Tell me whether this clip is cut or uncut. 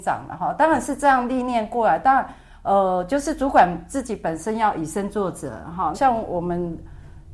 cut